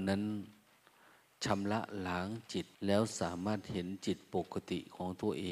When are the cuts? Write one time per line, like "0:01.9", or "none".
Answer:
0:02.7